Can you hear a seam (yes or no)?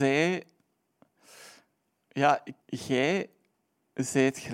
yes